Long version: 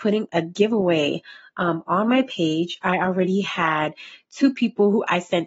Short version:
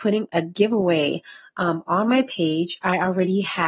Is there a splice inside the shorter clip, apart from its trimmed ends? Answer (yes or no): no